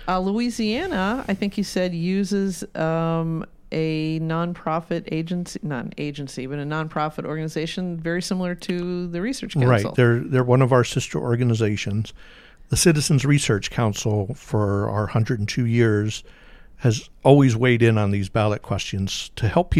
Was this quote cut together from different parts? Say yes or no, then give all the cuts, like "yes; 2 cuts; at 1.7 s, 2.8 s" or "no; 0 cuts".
no; 0 cuts